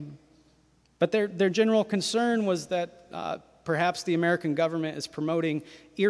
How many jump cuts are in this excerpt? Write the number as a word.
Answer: zero